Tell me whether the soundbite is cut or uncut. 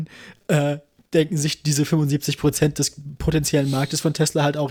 uncut